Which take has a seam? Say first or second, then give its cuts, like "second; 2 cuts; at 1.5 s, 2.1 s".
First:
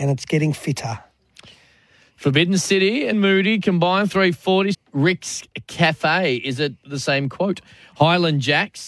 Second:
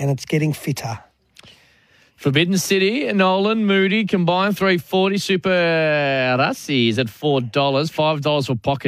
first; 2 cuts; at 3.1 s, 4.7 s